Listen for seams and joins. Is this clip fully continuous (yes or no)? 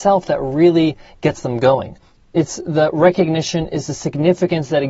yes